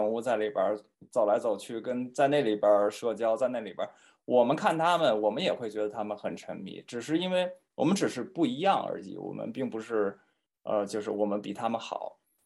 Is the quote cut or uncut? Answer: uncut